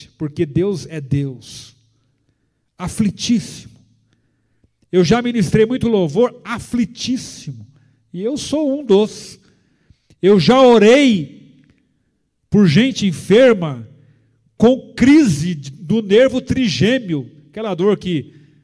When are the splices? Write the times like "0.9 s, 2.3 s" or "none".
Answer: none